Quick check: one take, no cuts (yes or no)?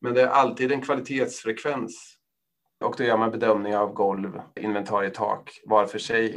no